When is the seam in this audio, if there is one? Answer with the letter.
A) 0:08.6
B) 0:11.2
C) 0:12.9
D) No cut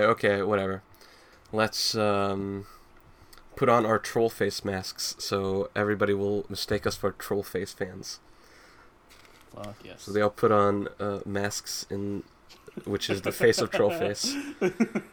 D